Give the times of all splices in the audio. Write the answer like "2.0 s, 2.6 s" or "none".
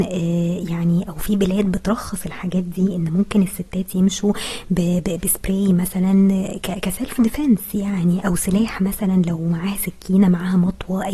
8.2 s